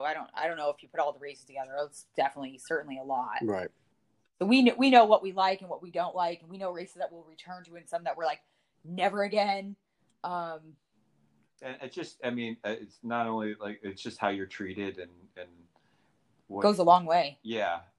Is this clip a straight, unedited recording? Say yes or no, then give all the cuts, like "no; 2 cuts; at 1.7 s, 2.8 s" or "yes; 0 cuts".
yes; 0 cuts